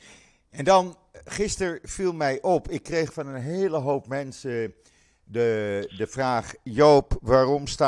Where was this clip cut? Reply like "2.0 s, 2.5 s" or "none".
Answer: none